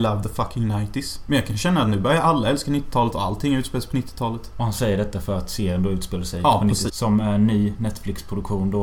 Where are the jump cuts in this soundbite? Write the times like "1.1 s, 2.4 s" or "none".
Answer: 6.9 s